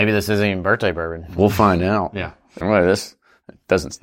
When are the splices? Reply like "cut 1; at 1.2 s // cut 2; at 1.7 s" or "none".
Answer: cut 1; at 2.6 s